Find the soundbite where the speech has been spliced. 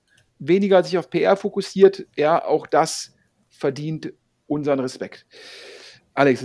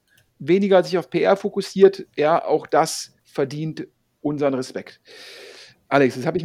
second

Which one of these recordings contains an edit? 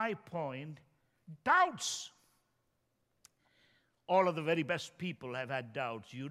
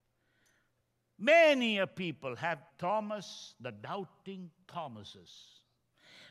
second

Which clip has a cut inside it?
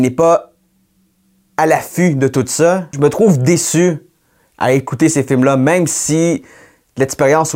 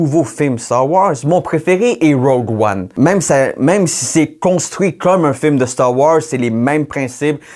first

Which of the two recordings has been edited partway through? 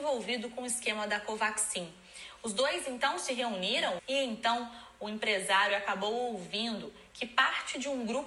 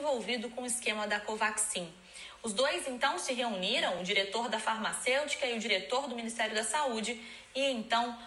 first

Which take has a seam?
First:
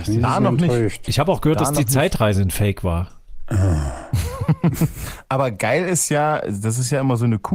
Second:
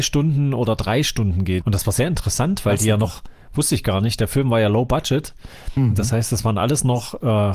second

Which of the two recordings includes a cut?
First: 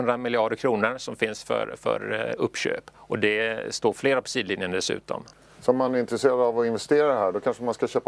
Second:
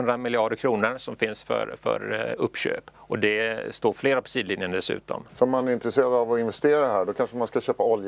second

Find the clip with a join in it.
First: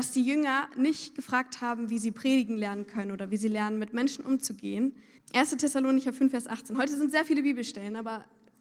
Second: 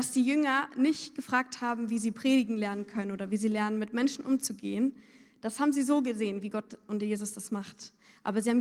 first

